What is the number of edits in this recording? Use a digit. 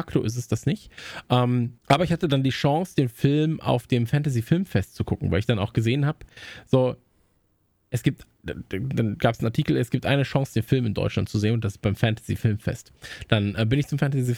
1